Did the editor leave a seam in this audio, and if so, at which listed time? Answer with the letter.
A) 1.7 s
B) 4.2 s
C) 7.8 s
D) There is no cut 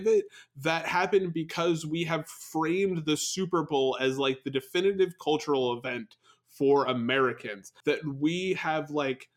C